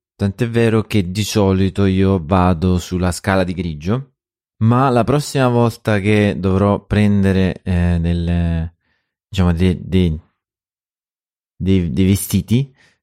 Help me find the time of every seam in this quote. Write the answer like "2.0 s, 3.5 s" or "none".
none

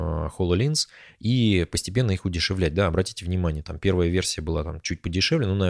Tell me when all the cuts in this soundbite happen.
none

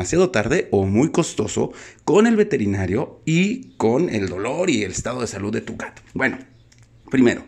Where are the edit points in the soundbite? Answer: 6.1 s

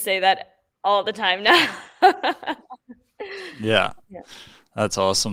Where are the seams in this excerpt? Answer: none

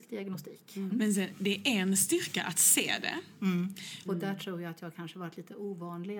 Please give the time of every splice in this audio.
0.9 s, 4.1 s

